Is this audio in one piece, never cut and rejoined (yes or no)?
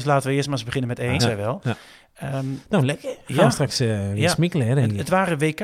no